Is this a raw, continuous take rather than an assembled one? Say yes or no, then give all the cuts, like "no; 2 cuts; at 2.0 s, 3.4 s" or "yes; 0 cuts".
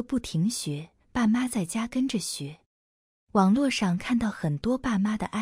no; 2 cuts; at 1.0 s, 3.2 s